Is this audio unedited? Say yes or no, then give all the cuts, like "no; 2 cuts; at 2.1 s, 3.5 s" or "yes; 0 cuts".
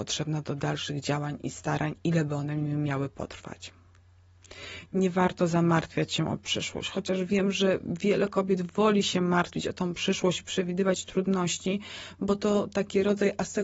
yes; 0 cuts